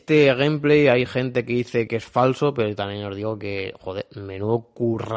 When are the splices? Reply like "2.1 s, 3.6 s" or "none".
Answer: 1.9 s